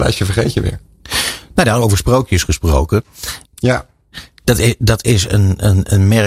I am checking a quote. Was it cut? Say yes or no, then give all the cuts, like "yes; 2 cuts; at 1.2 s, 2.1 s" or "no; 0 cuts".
yes; 1 cut; at 3.5 s